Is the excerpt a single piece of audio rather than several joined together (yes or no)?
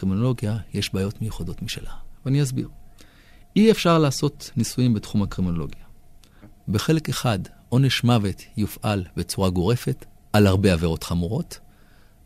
no